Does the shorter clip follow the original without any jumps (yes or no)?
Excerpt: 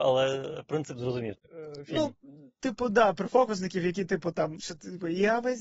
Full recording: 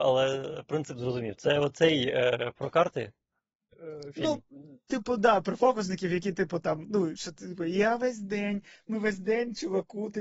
no